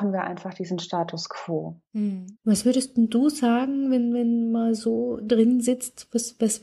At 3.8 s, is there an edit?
no; 1 cut; at 2.4 s

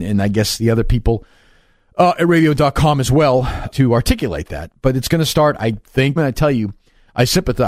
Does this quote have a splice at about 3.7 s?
yes; 2 cuts; at 3.7 s, 6.2 s

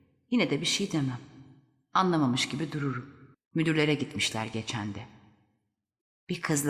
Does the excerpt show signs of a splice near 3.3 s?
yes; 1 cut; at 3.3 s

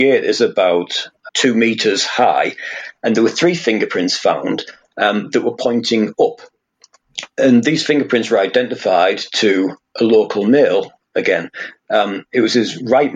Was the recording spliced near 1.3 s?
yes; 1 cut; at 1.3 s

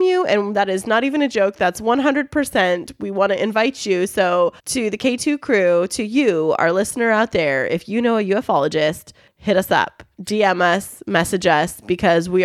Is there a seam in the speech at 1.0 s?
no; 1 cut; at 4.6 s

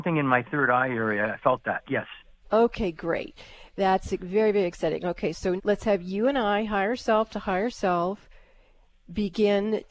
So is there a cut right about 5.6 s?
yes; 1 cut; at 5.6 s

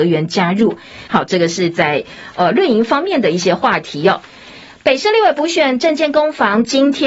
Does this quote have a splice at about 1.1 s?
yes; 1 cut; at 1.1 s

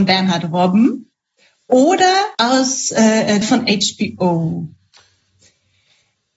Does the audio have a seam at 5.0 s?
no; 2 cuts; at 2.3 s, 3.4 s

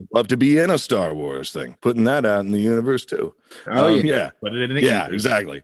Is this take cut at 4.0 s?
yes; 2 cuts; at 1.8 s, 4.0 s

